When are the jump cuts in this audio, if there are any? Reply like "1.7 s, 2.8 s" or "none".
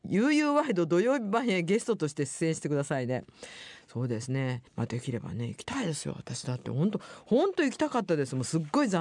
4.7 s

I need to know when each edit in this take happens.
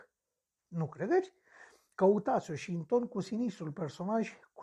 1.9 s

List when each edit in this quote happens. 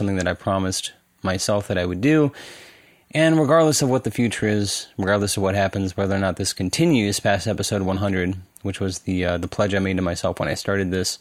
none

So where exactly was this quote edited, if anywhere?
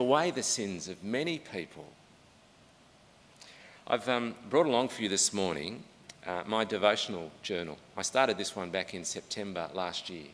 none

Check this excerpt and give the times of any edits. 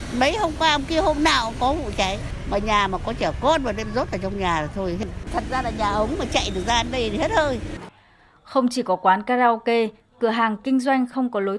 none

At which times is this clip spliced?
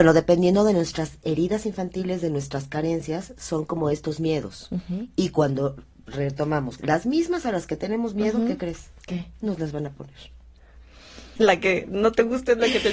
6.8 s, 11.4 s

